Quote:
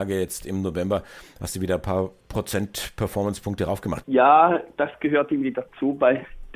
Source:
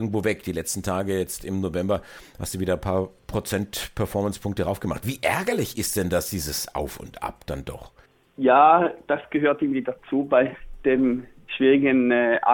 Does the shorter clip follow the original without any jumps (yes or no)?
no